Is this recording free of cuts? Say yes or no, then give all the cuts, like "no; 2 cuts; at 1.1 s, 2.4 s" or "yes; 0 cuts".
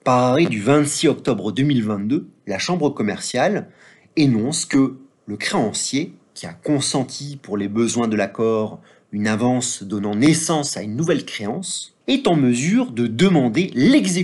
no; 1 cut; at 12.0 s